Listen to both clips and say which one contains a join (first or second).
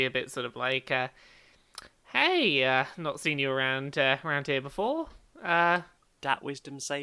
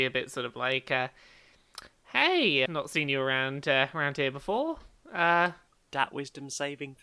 second